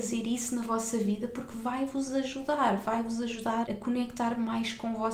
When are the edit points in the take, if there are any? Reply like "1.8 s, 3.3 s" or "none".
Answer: 3.7 s